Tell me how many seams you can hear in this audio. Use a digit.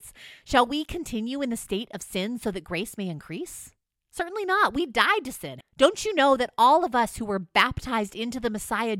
1